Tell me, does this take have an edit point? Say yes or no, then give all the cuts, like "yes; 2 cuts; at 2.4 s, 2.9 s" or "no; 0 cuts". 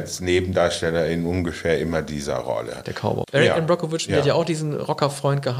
yes; 1 cut; at 3.2 s